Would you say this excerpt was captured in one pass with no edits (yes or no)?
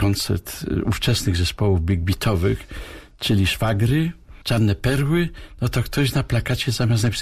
yes